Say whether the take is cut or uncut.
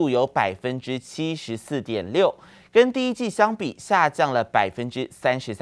uncut